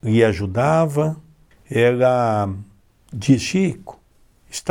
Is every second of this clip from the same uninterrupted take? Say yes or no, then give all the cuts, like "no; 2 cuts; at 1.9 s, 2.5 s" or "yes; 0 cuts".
yes; 0 cuts